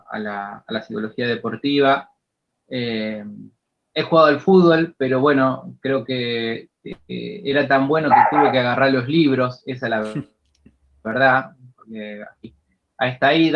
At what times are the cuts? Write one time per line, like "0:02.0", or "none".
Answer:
0:02.5